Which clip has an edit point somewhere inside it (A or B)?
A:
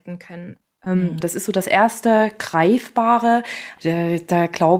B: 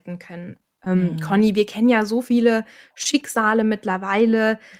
A